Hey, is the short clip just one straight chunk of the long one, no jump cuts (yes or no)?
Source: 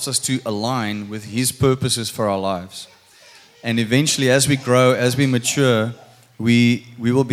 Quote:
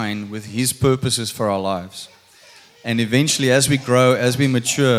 yes